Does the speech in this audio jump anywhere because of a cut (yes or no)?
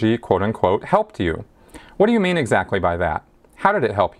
no